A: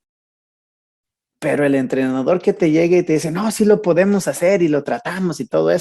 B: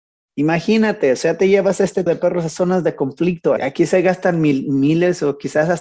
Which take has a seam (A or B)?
B